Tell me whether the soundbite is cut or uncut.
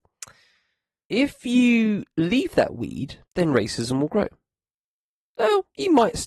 cut